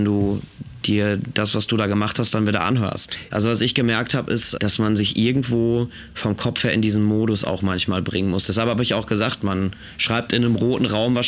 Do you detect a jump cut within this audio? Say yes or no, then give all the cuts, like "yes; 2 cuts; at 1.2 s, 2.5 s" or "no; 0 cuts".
yes; 2 cuts; at 3.3 s, 4.6 s